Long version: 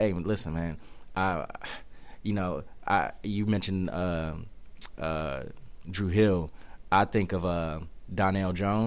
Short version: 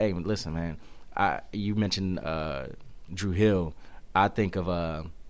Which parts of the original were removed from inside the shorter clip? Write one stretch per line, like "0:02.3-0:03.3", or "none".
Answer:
0:01.1-0:02.8
0:03.9-0:05.0